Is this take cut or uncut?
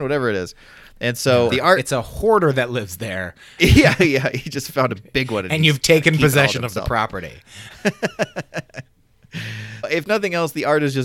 cut